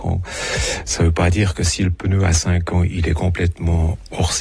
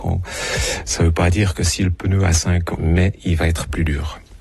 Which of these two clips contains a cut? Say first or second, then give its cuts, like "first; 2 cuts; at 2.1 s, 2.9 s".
second; 1 cut; at 2.7 s